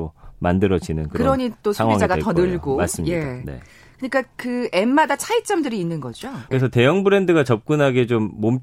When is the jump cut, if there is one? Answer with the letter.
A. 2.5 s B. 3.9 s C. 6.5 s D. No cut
C